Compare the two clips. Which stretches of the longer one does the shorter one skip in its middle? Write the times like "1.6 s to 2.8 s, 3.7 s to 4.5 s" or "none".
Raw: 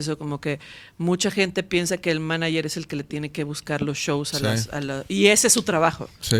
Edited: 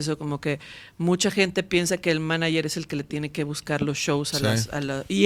none